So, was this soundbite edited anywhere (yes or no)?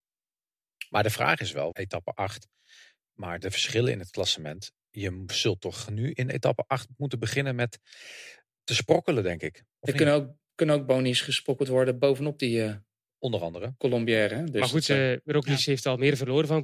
yes